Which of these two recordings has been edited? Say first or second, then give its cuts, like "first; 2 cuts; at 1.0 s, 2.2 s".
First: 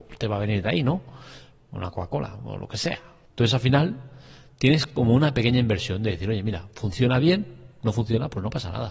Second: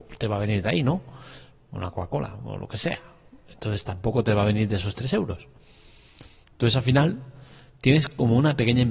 first; 1 cut; at 3.2 s